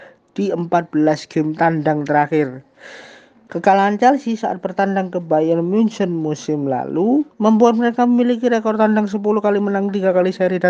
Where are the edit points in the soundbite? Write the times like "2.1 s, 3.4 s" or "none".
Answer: 3.5 s, 7.3 s

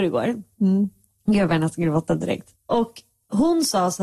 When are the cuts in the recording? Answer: 2.6 s

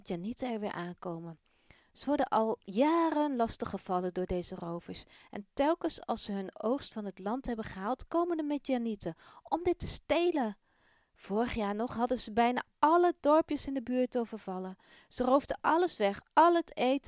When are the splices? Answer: none

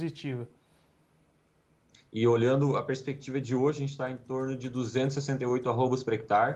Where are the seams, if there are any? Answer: 2.0 s

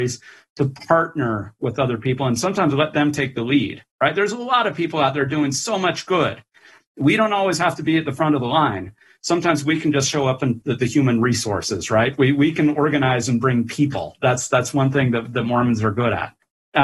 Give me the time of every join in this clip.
10.6 s

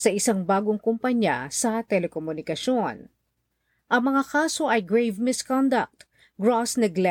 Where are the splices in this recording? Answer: none

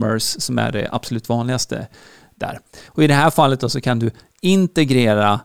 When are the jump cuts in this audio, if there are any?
2.9 s

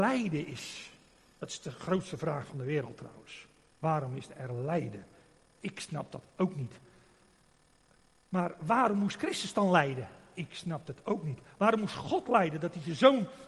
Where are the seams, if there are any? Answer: none

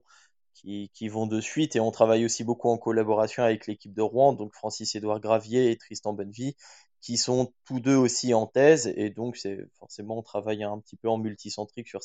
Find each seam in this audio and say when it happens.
none

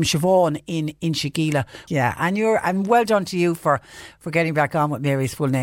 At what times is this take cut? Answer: 1.9 s

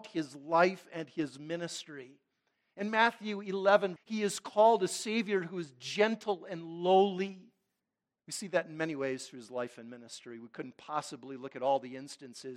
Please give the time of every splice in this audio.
4.0 s, 8.2 s

